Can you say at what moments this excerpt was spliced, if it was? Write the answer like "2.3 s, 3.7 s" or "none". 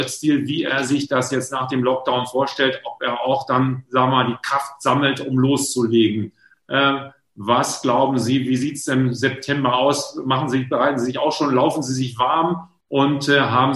6.5 s